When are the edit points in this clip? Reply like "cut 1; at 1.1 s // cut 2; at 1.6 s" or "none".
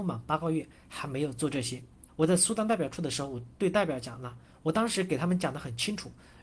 cut 1; at 2.1 s